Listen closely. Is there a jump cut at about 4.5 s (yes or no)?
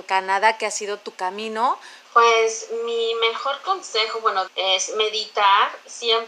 yes